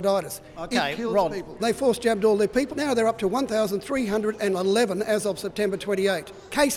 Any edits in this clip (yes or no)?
yes